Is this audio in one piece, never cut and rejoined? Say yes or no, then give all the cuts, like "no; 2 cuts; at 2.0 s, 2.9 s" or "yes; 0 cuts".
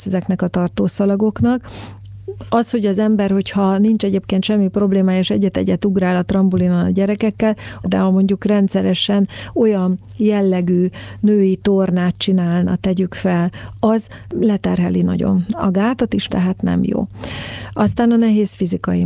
no; 3 cuts; at 7.8 s, 13.7 s, 16.3 s